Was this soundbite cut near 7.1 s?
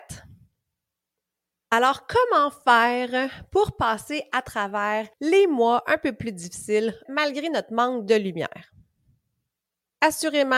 yes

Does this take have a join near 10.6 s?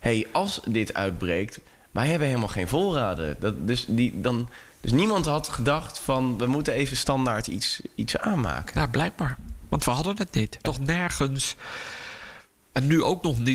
yes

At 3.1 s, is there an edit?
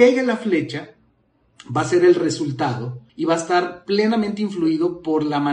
yes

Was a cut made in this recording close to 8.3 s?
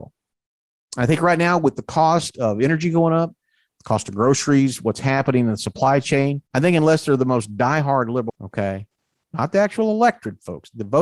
yes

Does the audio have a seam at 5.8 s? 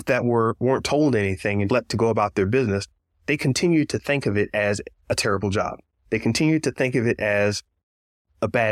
no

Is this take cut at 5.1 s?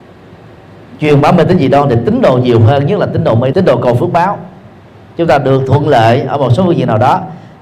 no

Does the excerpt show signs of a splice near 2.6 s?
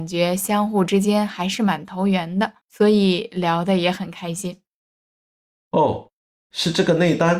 yes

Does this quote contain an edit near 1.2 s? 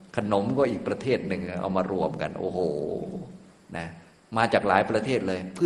no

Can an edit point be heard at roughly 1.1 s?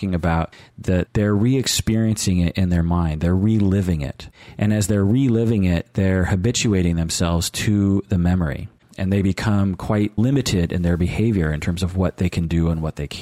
yes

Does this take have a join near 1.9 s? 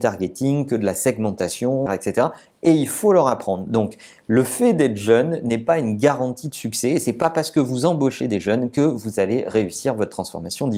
yes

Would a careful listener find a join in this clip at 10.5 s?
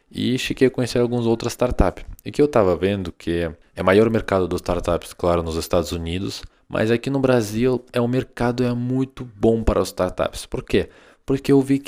no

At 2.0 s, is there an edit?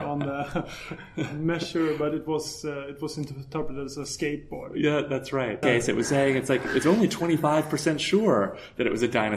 no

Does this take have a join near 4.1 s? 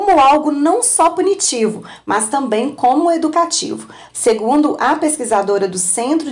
yes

